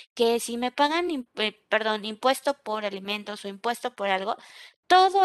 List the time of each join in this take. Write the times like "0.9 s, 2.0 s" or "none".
none

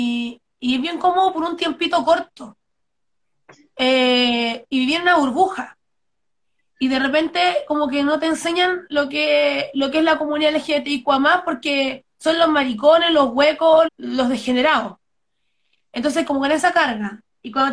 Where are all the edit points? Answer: 13.8 s, 16.2 s

